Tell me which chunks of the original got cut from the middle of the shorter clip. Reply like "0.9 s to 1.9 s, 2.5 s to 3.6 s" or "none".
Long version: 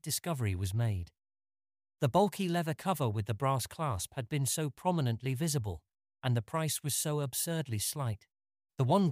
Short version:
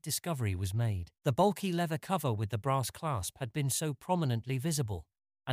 1.2 s to 1.9 s